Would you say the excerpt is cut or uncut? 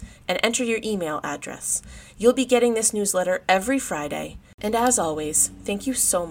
uncut